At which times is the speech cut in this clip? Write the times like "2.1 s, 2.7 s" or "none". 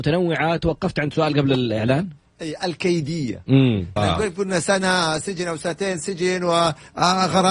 4.0 s

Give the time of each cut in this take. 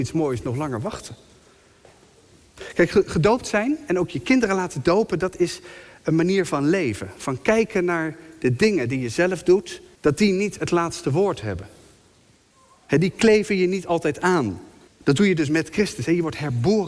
9.9 s, 14.9 s

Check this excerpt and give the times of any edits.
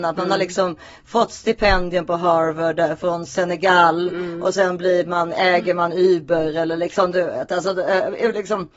none

